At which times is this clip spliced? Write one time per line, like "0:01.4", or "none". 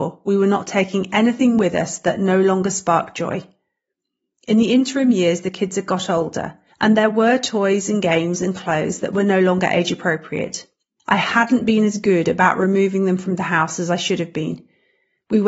none